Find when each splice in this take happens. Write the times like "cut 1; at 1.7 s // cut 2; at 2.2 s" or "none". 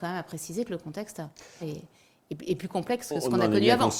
cut 1; at 1.6 s